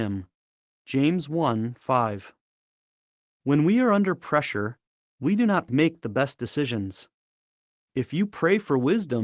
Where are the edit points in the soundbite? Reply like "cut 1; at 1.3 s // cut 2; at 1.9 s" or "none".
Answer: cut 1; at 5.7 s